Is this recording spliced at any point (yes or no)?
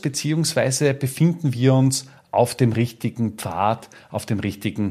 no